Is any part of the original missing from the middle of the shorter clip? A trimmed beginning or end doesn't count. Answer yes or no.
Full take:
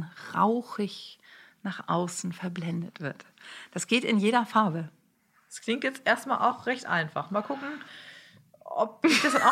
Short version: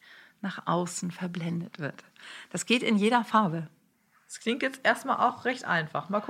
no